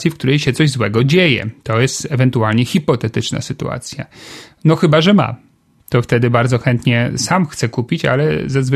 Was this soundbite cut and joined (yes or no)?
no